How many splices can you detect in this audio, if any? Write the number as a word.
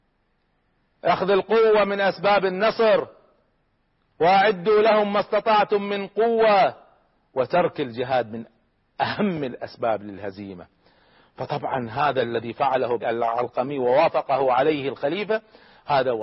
one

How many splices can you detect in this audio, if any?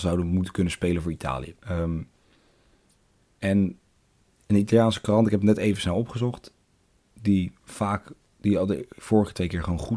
one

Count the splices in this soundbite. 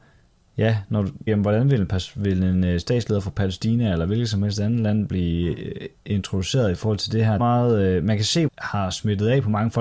three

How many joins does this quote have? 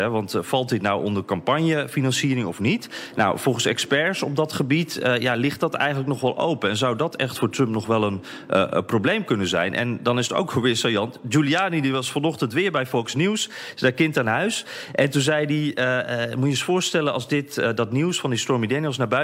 zero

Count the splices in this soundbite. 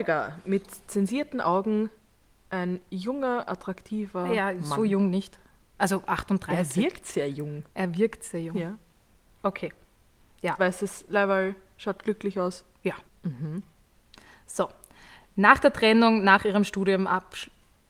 two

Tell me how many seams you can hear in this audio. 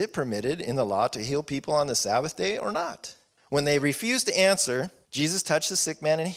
zero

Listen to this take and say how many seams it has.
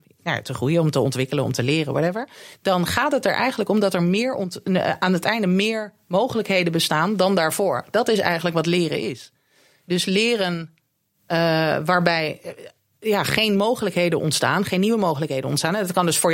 zero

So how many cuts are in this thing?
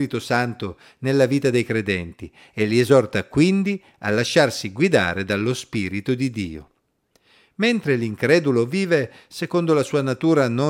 zero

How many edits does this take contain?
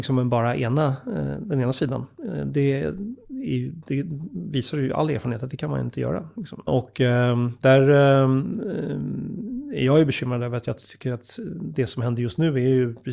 one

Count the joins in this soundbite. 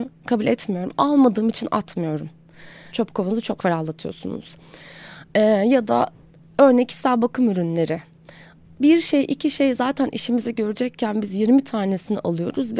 one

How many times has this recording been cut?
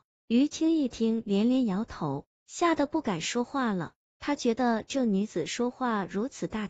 zero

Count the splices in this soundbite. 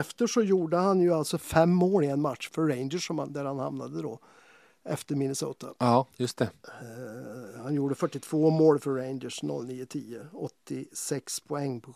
one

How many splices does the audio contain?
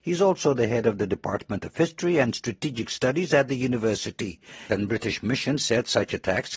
one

